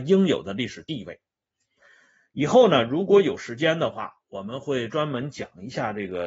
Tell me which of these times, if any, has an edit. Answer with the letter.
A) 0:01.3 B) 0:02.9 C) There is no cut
C